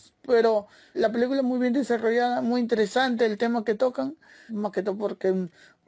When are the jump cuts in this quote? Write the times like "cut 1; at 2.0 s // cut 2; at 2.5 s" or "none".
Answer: cut 1; at 0.9 s // cut 2; at 4.5 s